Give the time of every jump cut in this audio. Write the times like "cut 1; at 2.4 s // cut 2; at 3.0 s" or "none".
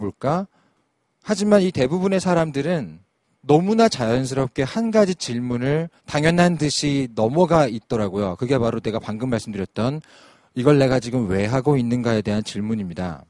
cut 1; at 6.0 s